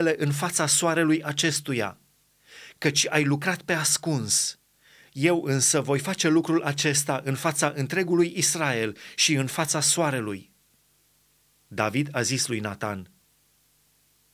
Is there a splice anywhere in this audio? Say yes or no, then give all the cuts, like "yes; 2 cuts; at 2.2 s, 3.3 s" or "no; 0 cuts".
no; 0 cuts